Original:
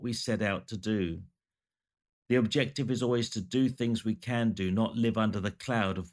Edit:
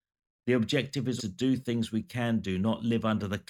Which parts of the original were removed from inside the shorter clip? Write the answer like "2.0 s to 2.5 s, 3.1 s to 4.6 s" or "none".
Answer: 3.0 s to 3.3 s